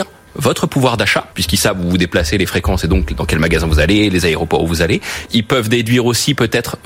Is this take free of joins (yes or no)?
no